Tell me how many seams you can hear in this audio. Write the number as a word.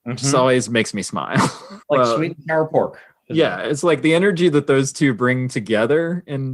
one